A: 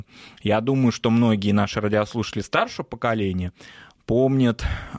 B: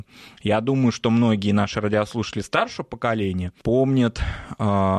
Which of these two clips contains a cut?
B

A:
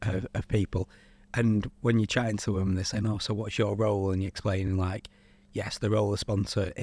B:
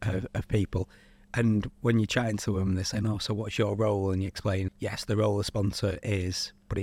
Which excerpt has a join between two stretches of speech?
B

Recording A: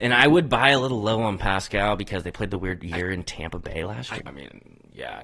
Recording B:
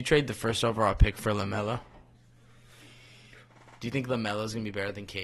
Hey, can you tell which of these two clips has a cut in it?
A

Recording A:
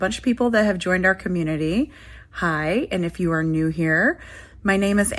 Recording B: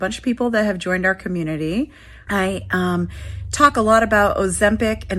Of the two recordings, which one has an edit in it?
B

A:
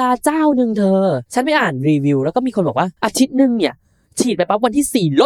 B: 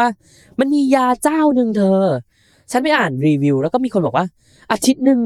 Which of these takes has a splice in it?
A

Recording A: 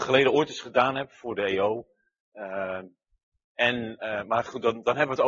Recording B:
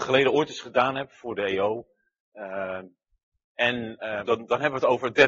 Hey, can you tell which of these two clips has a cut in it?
B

